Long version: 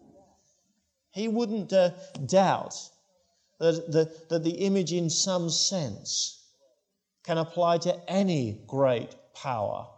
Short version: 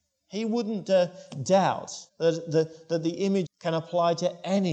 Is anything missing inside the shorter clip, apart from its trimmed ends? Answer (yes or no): yes